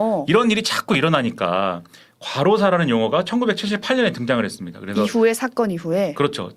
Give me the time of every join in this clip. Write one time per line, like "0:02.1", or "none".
none